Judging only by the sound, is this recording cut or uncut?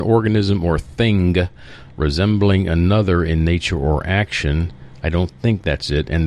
uncut